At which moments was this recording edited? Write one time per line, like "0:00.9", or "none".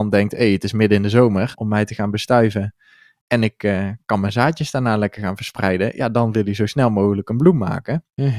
0:01.5